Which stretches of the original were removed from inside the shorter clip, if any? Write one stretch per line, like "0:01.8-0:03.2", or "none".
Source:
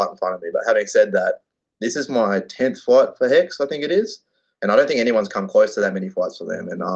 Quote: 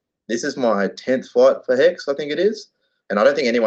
none